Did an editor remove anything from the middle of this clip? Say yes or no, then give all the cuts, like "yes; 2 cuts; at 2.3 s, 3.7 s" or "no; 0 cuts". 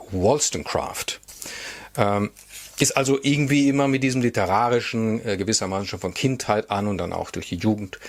no; 0 cuts